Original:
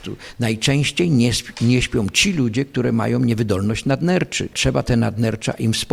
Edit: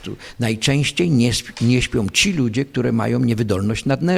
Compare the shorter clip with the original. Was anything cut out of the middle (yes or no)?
no